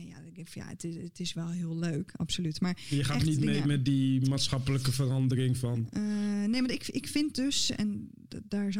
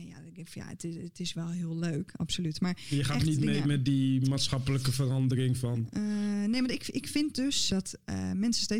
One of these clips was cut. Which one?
second; 1 cut; at 7.7 s

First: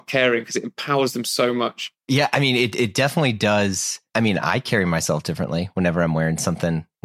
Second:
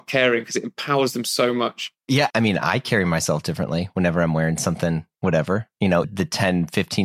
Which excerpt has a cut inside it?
second; 2 cuts; at 2.3 s, 6.0 s

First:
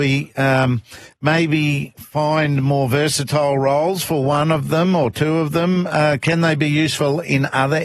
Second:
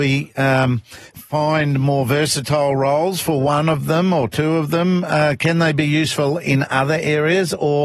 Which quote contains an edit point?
second; 1 cut; at 1.1 s

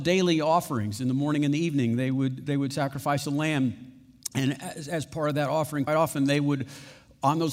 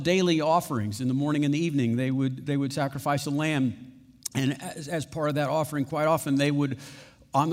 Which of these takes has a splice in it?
first; 1 cut; at 5.9 s

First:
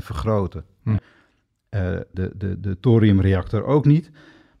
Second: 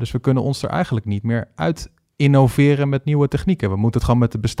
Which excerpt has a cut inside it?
first; 2 cuts; at 1.0 s, 2.1 s

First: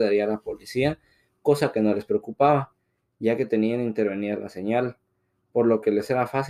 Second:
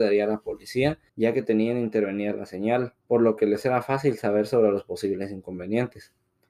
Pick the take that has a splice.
second; 2 cuts; at 1.1 s, 3.0 s

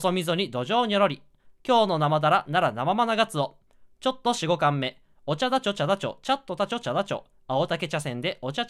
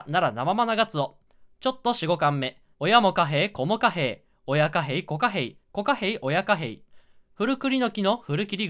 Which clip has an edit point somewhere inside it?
second; 1 cut; at 2.7 s

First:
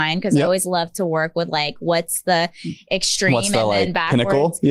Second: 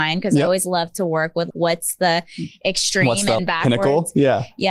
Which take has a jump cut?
second; 2 cuts; at 1.5 s, 3.4 s

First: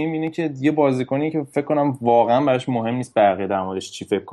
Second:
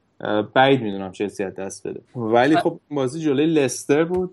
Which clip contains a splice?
second; 1 cut; at 2.1 s

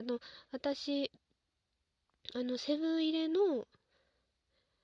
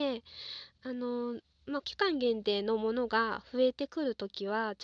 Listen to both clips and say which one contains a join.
second; 1 cut; at 1.8 s

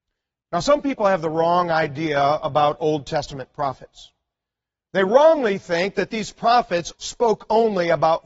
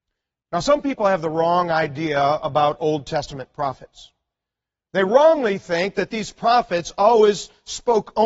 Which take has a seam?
first; 1 cut; at 6.9 s

